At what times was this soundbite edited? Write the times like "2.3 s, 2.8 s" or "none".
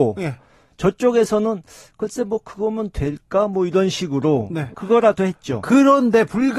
4.7 s